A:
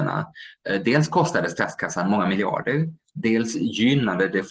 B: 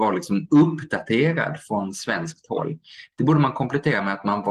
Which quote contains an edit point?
B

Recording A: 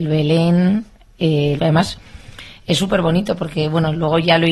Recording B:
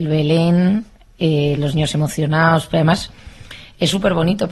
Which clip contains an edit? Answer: A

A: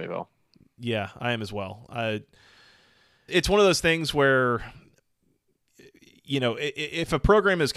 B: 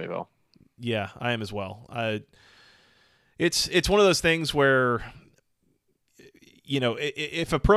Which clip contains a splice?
A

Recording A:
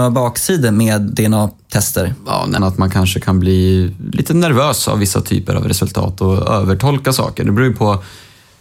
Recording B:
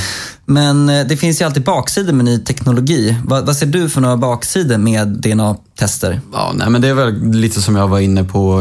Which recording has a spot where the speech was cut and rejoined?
A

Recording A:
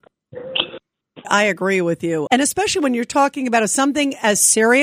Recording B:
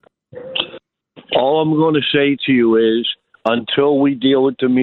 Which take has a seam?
A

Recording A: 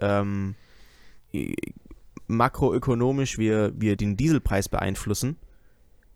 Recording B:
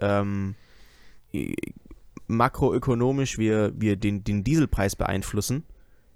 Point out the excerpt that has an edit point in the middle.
A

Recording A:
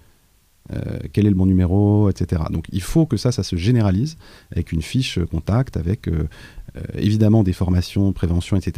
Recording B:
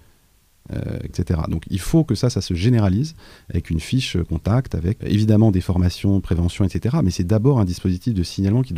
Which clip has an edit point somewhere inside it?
B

